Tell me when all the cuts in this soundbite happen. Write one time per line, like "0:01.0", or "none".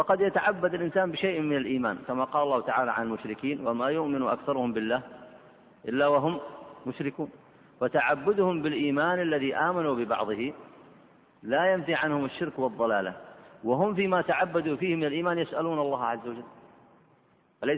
none